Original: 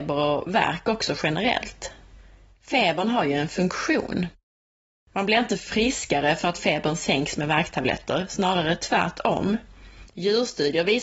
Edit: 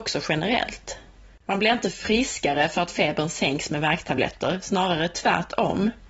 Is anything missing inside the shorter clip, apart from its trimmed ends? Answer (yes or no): yes